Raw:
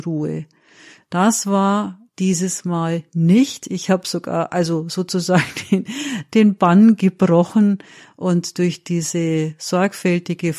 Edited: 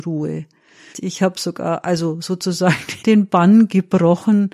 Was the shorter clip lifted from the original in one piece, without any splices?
no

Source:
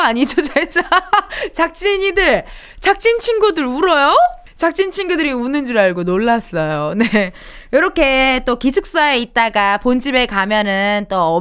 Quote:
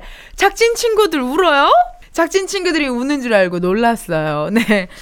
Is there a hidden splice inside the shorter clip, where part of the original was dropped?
no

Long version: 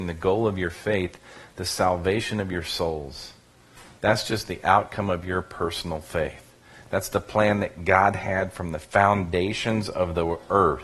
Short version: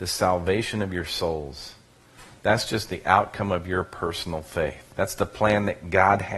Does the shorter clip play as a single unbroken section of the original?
no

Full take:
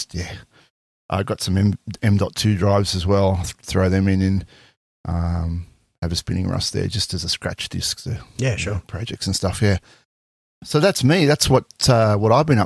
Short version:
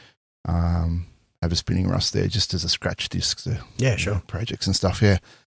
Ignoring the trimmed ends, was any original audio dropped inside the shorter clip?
no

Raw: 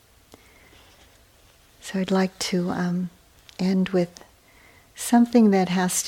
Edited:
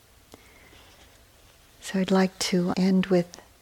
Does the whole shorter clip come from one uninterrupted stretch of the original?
no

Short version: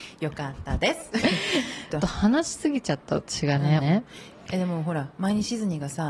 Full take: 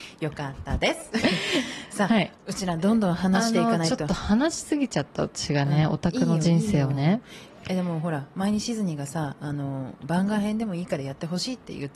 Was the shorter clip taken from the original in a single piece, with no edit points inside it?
no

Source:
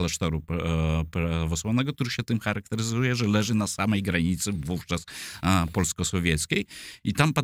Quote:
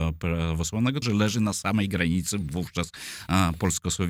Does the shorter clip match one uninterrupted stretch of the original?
no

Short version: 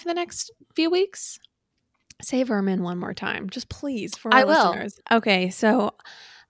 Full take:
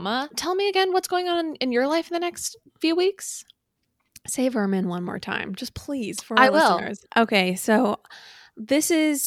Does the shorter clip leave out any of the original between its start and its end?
no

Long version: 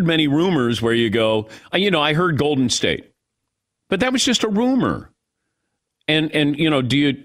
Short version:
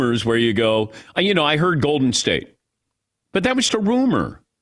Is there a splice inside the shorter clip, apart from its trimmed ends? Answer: yes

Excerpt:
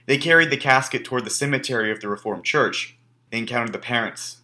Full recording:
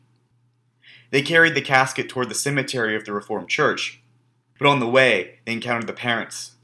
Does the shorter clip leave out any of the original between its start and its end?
yes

